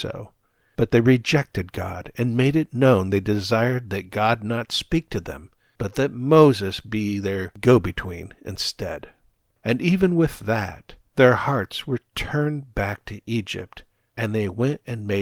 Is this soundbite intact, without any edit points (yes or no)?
yes